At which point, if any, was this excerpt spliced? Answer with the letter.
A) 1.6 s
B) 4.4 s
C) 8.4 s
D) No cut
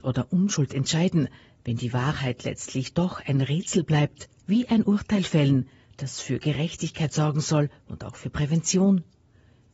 B